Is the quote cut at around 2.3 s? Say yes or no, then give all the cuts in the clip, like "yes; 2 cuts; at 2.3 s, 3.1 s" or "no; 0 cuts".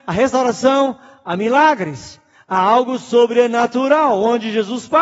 no; 0 cuts